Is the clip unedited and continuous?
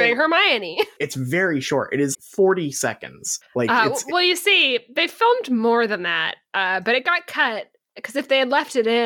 no; 2 cuts; at 1.0 s, 2.1 s

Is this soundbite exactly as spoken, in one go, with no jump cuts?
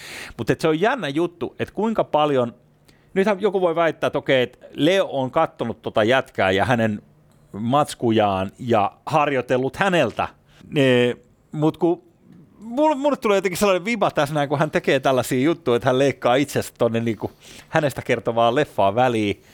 no; 1 cut; at 10.6 s

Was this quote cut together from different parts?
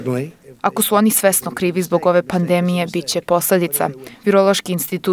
yes; 1 cut; at 4.1 s

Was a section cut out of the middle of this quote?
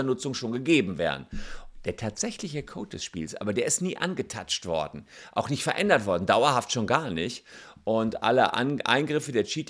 no; 0 cuts

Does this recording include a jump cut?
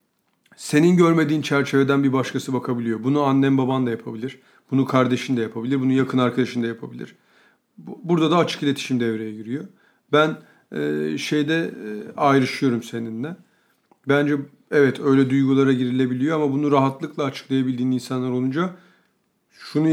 no; 0 cuts

